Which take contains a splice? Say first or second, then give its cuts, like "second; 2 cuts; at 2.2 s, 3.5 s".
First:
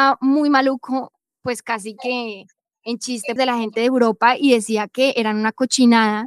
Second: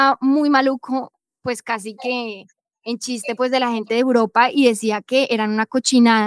first; 1 cut; at 3.4 s